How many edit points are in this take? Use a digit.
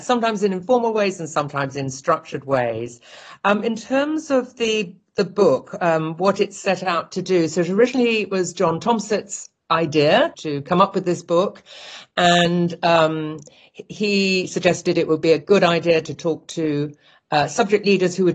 0